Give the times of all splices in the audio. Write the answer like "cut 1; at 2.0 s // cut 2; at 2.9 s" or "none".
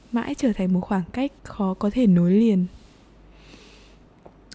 cut 1; at 1.4 s